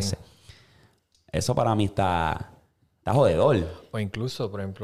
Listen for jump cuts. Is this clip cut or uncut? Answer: uncut